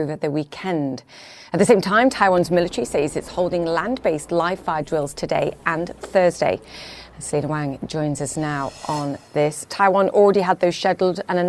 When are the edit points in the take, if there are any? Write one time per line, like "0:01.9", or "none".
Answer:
0:09.7